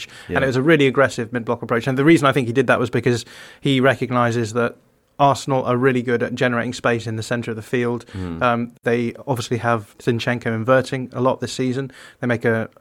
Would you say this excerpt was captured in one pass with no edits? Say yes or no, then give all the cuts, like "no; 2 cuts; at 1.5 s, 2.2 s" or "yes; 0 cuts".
yes; 0 cuts